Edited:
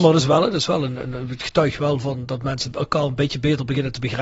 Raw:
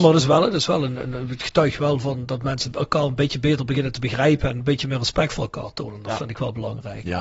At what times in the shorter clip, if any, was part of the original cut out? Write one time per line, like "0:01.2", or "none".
none